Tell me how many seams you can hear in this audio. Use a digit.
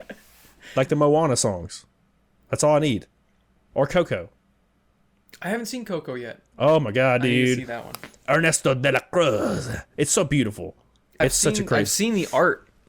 1